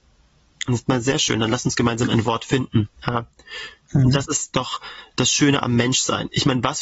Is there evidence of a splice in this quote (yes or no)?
yes